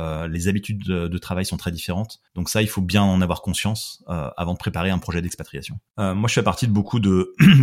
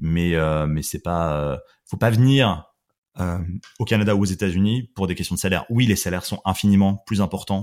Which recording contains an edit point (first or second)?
first